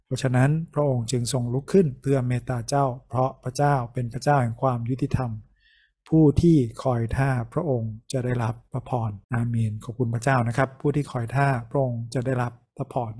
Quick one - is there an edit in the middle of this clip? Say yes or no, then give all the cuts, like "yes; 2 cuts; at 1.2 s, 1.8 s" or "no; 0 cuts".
yes; 1 cut; at 9.2 s